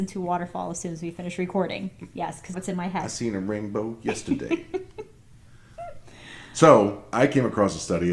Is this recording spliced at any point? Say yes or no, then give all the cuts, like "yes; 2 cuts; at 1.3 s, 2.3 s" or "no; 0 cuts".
yes; 1 cut; at 2.5 s